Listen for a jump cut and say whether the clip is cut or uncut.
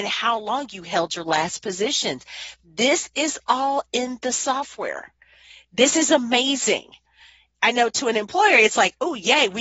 uncut